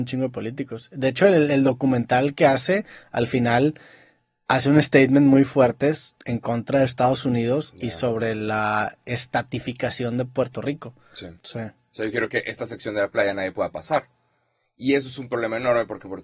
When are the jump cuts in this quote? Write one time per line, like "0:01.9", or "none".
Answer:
0:11.4